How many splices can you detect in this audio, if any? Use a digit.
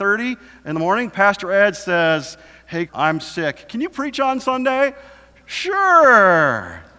1